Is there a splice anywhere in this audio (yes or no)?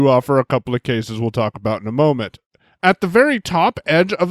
no